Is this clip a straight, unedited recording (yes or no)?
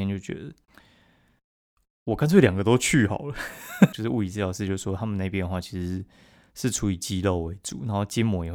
no